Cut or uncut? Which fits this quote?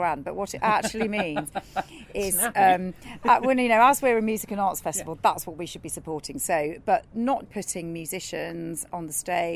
cut